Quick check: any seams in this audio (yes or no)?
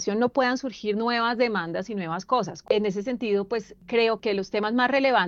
yes